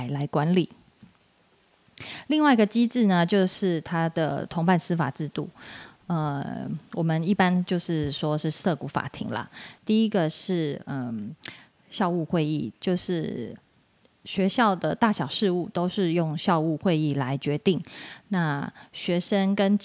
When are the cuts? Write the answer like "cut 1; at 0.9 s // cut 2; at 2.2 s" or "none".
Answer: cut 1; at 9.8 s